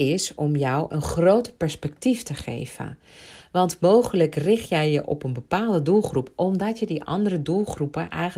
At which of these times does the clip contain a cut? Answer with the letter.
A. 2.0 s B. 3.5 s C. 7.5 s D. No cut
D